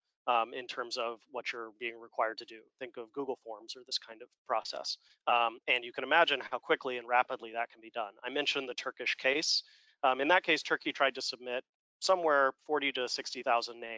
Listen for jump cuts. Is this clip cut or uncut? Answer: cut